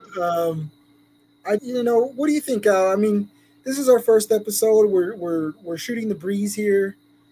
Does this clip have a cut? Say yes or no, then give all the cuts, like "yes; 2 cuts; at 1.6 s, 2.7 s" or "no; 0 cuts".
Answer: yes; 1 cut; at 1.6 s